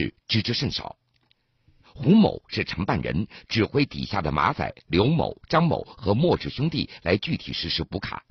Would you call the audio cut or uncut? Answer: cut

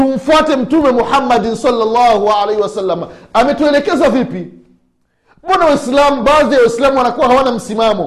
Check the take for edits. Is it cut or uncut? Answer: uncut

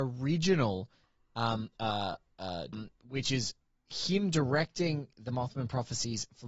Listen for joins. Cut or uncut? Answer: cut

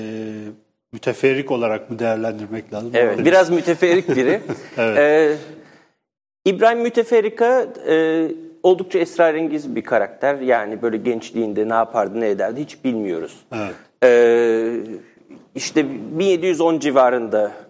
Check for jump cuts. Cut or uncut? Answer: cut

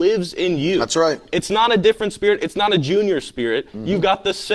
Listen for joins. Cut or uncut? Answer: uncut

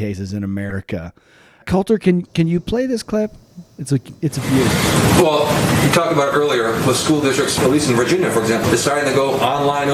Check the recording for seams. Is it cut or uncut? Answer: cut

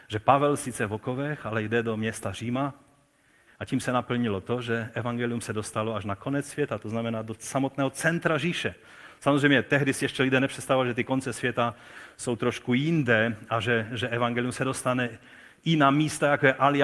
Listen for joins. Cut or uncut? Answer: uncut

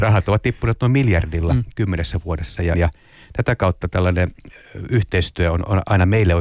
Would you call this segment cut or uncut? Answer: cut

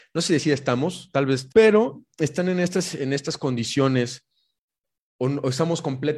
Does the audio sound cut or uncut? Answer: cut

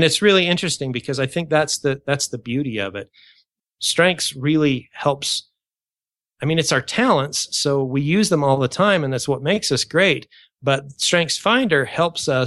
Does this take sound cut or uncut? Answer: uncut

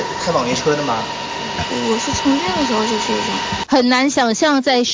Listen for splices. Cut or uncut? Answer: cut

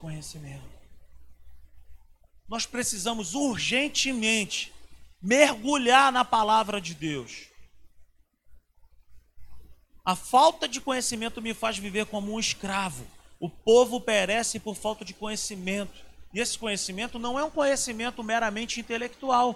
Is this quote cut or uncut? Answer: uncut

